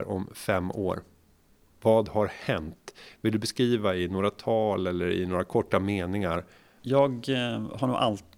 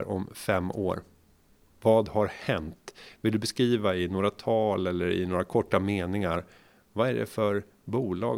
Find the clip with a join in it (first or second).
first